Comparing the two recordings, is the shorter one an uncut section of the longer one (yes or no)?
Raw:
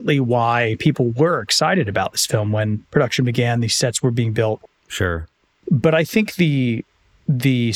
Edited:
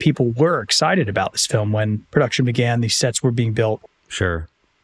yes